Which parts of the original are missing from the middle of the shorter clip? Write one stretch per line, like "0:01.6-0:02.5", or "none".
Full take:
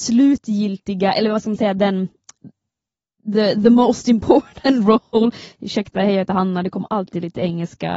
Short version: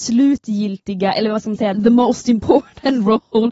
0:01.7-0:03.5